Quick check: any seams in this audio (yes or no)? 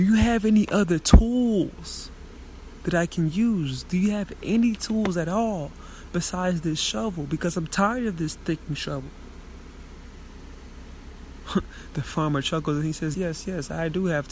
yes